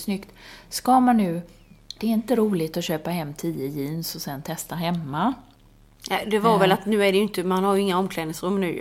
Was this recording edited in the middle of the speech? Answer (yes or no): yes